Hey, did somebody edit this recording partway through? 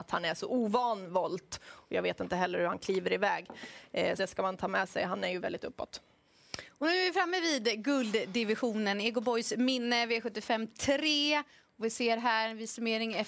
yes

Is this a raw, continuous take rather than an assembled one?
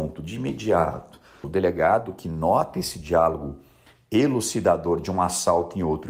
no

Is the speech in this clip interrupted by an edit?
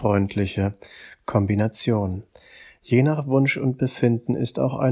no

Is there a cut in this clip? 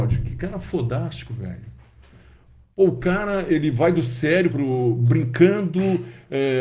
yes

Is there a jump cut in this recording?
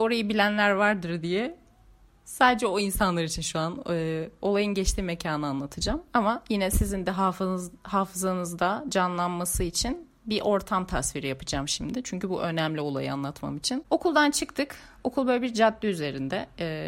no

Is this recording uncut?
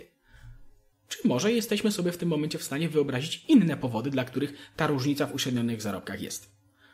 no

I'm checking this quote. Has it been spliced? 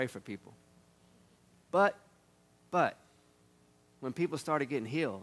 no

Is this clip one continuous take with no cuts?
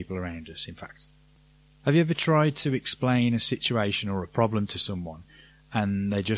yes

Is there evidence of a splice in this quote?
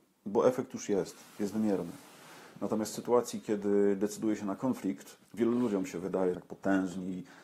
yes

